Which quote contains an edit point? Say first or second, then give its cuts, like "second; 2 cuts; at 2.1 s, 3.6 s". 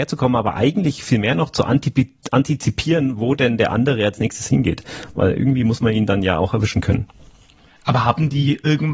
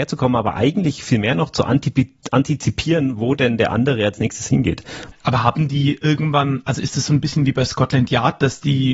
second; 1 cut; at 5.1 s